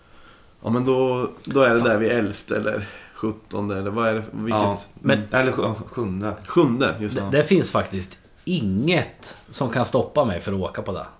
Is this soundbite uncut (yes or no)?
yes